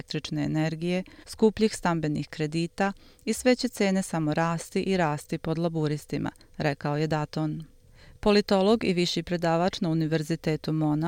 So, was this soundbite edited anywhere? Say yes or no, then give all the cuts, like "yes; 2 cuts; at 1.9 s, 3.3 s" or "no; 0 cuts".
yes; 1 cut; at 1.2 s